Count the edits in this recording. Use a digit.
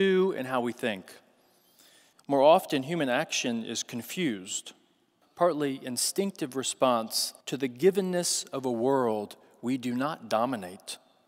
3